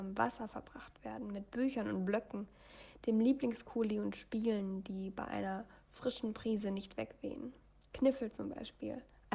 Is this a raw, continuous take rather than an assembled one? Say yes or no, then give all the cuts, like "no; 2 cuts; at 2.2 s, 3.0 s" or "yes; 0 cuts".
yes; 0 cuts